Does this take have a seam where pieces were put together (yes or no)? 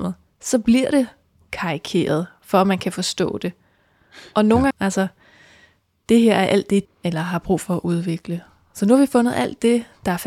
yes